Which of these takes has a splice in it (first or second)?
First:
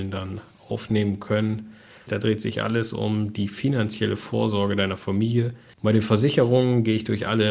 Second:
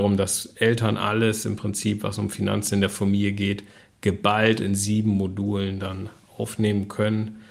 first